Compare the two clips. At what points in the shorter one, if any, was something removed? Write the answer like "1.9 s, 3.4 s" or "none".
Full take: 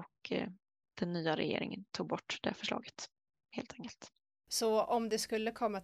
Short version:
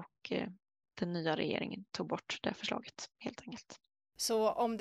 3.1 s